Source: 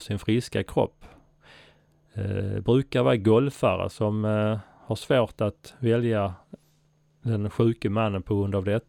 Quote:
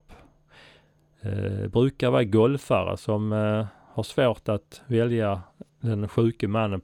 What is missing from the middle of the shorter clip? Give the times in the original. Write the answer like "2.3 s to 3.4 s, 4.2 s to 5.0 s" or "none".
6.6 s to 7.1 s